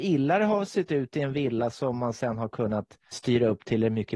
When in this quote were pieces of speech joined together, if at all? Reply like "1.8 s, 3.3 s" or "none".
3.1 s